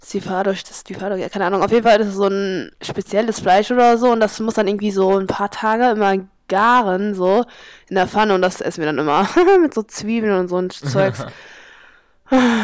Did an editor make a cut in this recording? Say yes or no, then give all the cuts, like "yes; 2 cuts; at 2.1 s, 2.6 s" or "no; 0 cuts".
no; 0 cuts